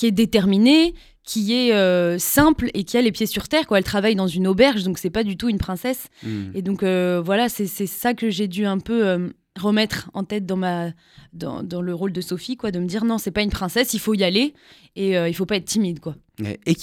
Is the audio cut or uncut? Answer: uncut